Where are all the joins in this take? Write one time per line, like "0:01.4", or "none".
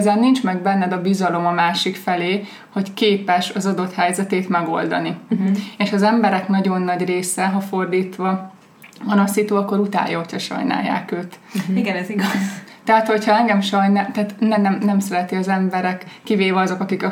none